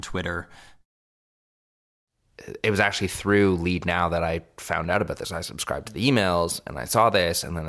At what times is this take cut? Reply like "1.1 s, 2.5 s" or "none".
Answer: none